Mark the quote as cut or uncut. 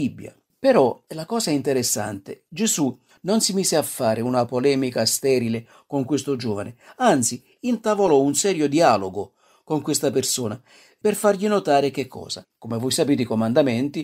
cut